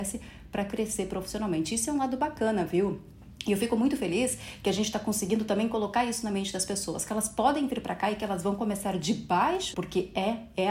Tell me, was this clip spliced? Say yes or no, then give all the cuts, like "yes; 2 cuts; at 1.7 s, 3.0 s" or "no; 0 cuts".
yes; 1 cut; at 9.7 s